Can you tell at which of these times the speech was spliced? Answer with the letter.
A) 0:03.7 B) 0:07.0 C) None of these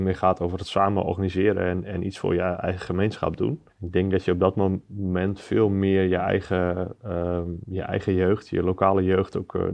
A